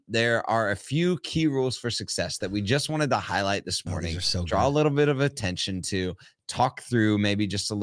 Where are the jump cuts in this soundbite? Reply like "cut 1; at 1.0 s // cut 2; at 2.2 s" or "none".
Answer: none